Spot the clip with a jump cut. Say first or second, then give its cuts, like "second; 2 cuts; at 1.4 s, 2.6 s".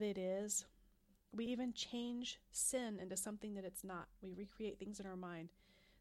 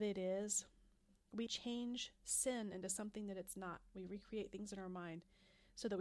second; 1 cut; at 1.5 s